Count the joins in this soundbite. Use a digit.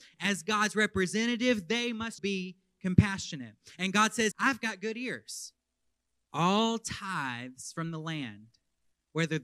3